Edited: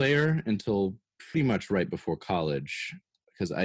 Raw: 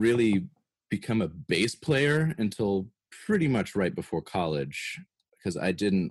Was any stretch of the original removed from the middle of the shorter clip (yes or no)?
yes